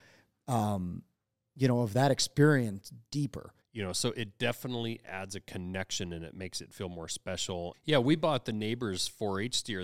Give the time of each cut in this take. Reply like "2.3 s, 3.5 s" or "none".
3.6 s, 7.7 s

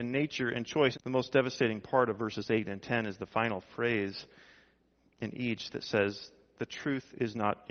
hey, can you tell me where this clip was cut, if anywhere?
0.9 s

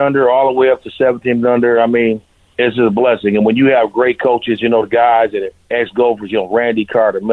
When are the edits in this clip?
none

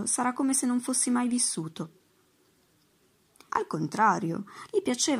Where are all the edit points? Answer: 3.5 s

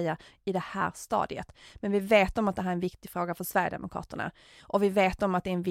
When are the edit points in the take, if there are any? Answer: none

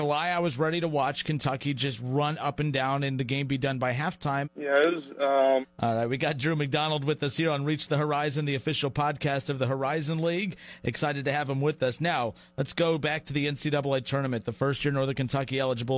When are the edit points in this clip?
4.4 s, 5.6 s

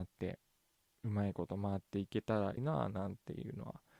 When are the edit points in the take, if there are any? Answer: 2.6 s

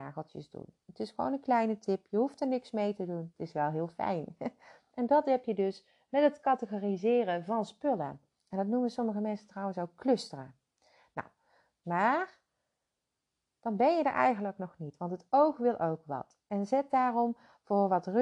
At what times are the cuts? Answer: 11.8 s

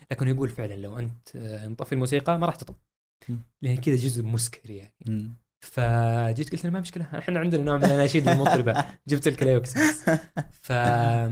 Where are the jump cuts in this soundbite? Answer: none

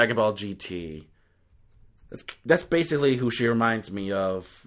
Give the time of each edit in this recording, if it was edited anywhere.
none

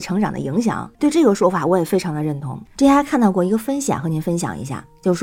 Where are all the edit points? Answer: 0.9 s, 2.7 s

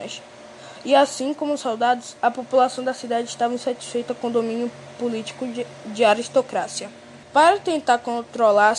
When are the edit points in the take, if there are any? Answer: 7.2 s

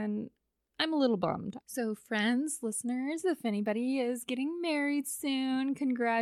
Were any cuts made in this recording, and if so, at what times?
1.6 s

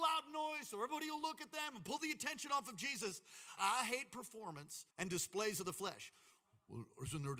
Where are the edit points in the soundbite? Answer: 3.6 s, 4.9 s

